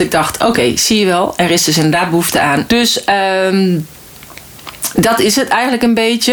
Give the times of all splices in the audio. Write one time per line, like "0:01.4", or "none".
0:02.7